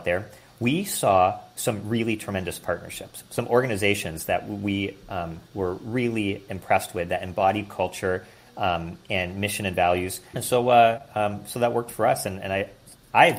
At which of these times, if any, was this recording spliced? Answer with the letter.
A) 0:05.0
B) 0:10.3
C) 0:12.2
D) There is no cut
B